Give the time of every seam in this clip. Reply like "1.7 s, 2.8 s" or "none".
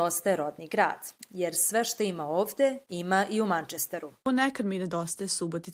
1.3 s